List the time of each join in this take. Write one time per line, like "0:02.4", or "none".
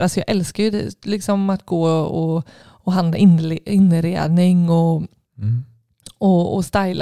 none